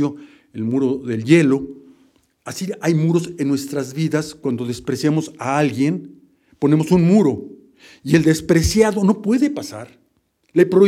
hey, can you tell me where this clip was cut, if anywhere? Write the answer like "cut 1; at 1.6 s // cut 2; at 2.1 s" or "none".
none